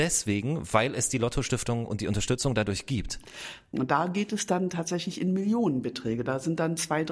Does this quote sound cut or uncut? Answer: cut